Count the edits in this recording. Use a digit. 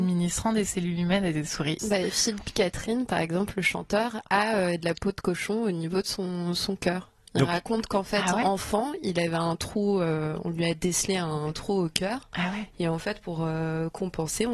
1